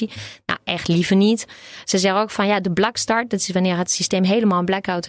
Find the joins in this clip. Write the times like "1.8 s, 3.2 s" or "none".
none